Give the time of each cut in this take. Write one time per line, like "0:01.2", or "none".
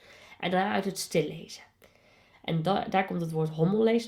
0:02.3